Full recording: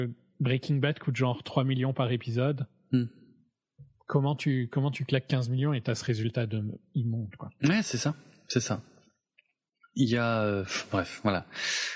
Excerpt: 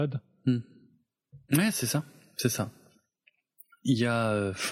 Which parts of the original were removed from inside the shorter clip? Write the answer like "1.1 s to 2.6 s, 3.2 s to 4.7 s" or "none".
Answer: 3.9 s to 7.6 s